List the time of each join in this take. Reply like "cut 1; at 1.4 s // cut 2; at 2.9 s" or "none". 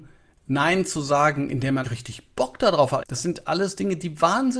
cut 1; at 1.8 s // cut 2; at 3.0 s